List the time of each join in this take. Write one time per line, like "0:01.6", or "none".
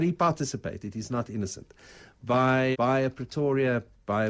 0:02.7